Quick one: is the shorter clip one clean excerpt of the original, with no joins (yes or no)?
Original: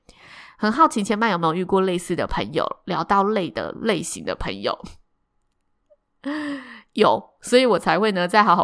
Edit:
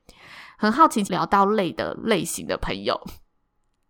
no